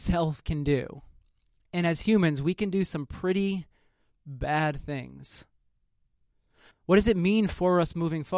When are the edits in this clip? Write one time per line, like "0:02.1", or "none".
0:06.7